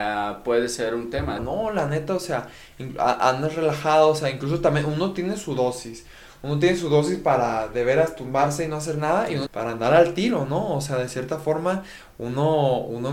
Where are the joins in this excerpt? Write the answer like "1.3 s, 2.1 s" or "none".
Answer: 1.4 s, 9.5 s

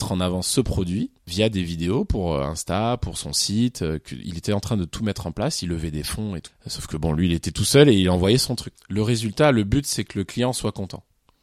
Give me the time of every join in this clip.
6.5 s, 8.8 s

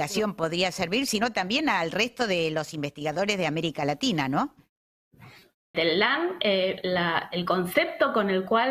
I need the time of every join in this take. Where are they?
5.7 s

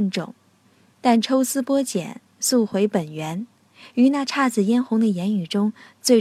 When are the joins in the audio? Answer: none

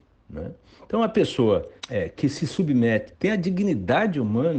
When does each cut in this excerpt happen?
1.8 s, 3.1 s

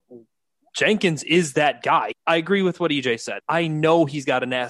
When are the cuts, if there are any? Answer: 2.1 s, 3.4 s

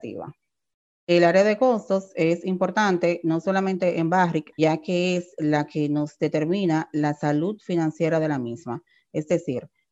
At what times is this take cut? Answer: 4.5 s

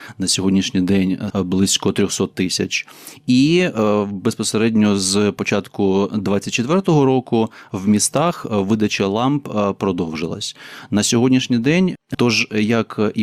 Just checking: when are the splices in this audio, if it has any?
1.3 s, 12.1 s

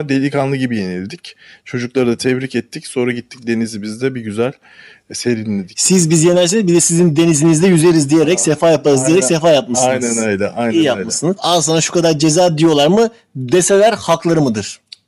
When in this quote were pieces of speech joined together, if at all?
11.4 s

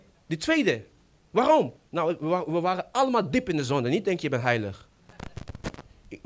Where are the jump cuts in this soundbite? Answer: 1.8 s

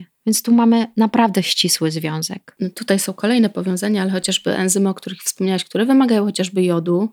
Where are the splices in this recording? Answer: none

